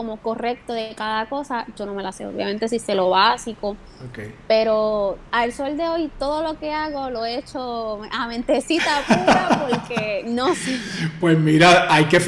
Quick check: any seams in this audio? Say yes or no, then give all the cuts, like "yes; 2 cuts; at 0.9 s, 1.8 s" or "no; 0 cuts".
yes; 1 cut; at 5.3 s